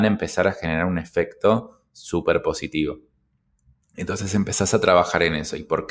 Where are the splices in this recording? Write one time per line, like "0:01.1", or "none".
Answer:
none

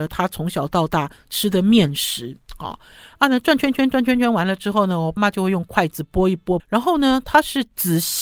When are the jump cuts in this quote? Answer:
0:05.2
0:06.6

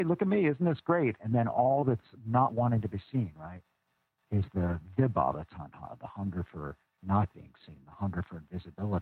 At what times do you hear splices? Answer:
none

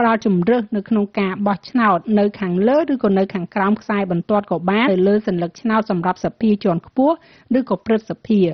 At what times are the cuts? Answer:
0:04.9

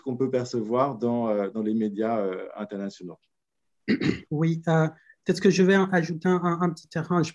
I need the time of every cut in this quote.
0:04.3

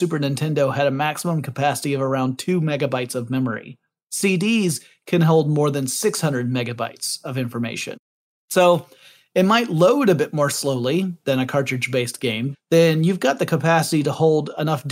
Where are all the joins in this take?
0:12.5

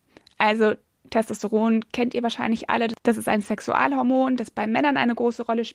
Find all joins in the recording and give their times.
none

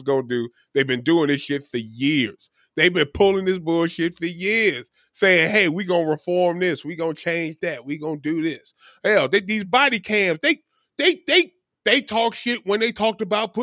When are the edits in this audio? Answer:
none

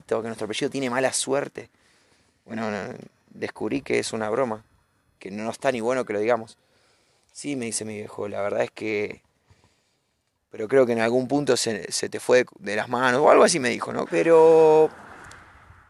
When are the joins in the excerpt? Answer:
0:05.2
0:10.4
0:14.0

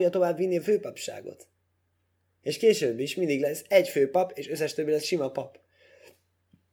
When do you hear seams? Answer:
0:02.3

